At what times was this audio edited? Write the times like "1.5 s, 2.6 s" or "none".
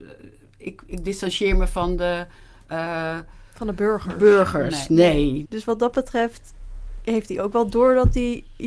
5.4 s